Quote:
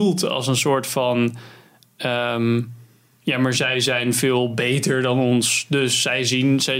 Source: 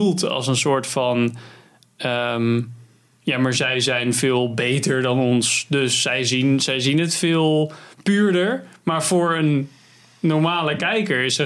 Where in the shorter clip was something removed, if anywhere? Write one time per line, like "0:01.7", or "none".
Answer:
none